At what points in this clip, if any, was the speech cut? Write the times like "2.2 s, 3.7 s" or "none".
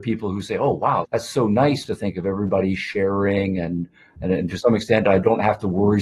1.0 s